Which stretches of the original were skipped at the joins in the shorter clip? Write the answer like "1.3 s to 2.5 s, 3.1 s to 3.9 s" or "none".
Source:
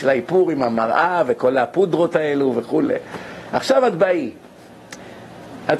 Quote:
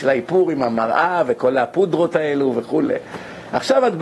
none